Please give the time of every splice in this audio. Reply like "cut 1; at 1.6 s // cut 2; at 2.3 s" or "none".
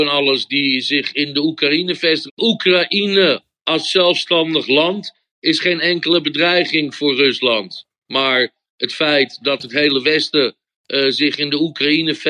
cut 1; at 2.3 s